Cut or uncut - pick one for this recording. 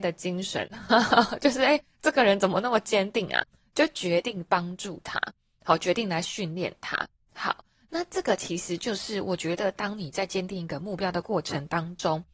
uncut